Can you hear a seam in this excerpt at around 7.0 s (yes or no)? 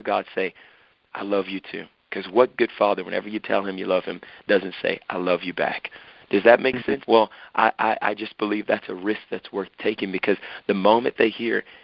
yes